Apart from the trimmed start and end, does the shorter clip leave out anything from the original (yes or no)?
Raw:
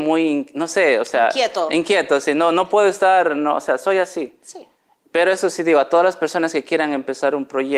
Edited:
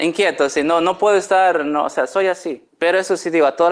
yes